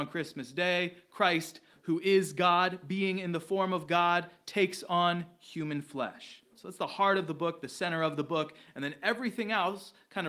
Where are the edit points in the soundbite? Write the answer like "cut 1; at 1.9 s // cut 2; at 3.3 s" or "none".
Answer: cut 1; at 6.5 s